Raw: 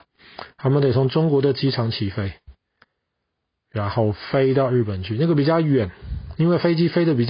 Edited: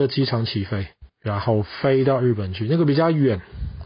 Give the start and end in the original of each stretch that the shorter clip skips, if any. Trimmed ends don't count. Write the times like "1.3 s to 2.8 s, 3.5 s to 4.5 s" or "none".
2.6 s to 3.6 s